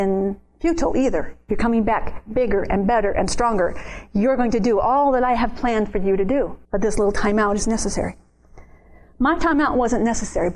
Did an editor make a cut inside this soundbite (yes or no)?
yes